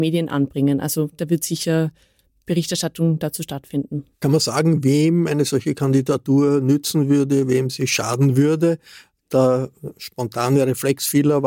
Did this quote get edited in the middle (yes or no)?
no